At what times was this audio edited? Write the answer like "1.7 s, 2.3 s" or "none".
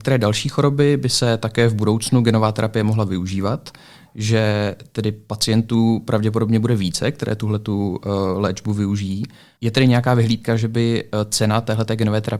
none